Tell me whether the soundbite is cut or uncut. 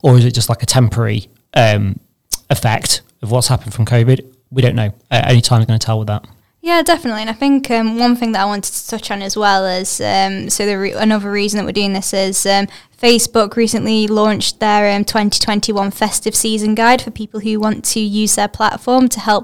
uncut